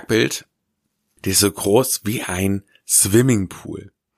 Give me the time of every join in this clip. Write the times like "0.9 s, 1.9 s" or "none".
1.2 s